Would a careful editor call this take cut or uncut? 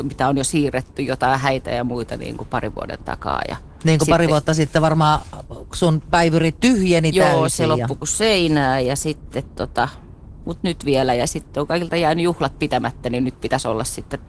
uncut